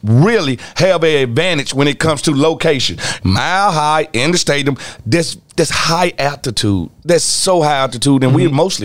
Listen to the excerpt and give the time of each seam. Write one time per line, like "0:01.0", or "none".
0:03.2